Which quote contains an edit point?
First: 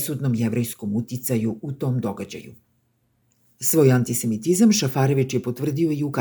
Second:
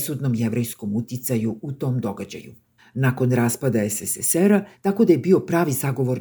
second; 2 cuts; at 2.8 s, 4.7 s

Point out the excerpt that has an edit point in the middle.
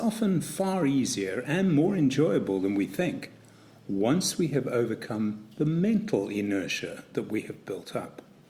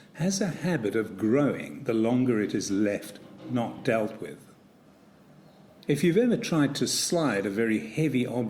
second; 1 cut; at 5.8 s

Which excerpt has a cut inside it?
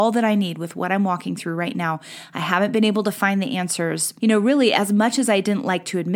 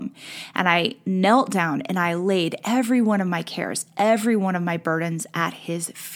first; 1 cut; at 4.2 s

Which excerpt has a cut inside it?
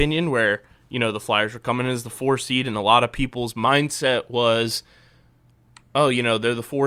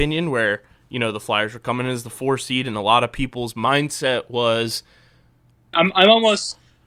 second; 1 cut; at 5.7 s

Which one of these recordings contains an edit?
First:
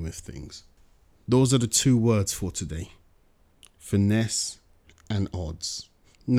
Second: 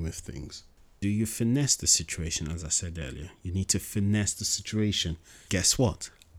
second; 1 cut; at 1.0 s

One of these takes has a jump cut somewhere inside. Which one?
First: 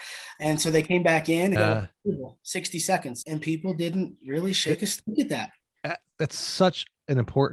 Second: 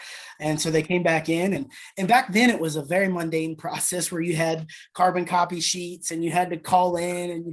first; 2 cuts; at 1.6 s, 3.2 s

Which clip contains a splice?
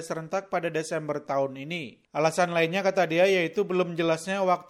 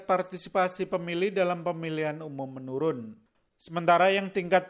second; 1 cut; at 3.5 s

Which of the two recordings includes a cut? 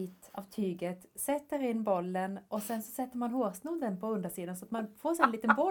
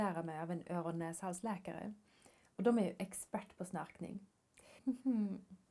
second; 1 cut; at 4.8 s

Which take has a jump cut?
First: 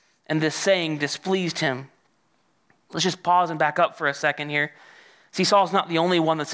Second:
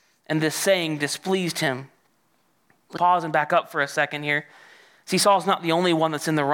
second; 1 cut; at 3.0 s

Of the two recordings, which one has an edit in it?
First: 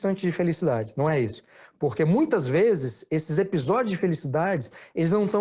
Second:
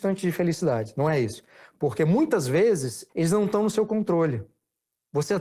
second; 1 cut; at 3.1 s

